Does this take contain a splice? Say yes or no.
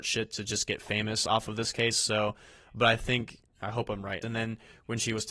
yes